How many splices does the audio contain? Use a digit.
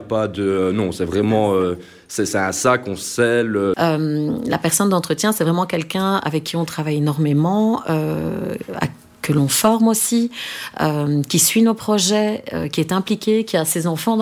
1